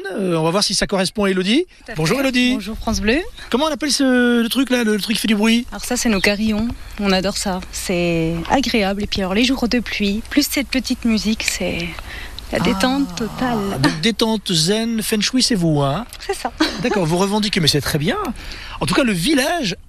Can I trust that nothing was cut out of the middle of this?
yes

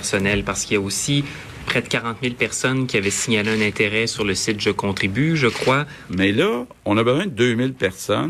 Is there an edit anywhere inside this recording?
yes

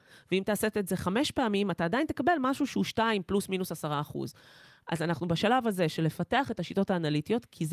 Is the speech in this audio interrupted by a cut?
no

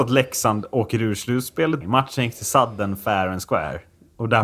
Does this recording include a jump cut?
yes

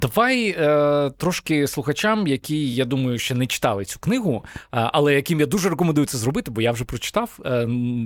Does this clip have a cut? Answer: no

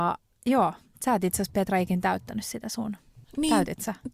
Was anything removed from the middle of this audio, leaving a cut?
yes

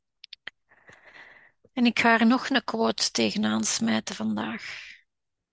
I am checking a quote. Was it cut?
no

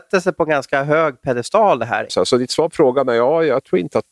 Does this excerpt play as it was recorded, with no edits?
no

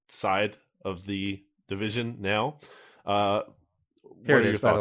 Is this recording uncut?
yes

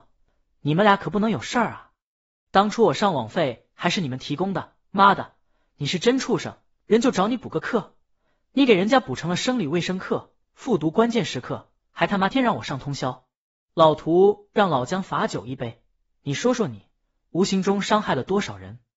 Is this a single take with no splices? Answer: no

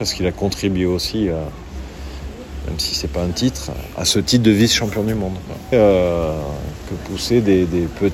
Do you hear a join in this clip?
yes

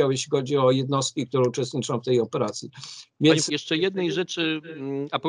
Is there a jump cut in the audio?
yes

